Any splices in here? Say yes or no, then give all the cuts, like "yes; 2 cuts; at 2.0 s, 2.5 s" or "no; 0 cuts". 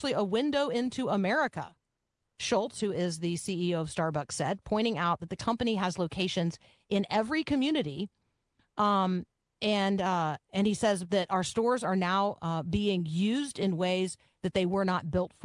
no; 0 cuts